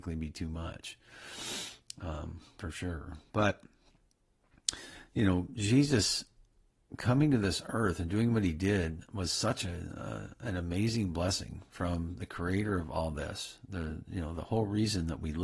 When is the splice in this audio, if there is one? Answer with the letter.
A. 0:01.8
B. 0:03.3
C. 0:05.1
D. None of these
D